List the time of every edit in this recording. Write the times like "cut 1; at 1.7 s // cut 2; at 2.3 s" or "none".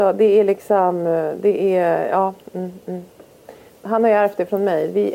cut 1; at 3.7 s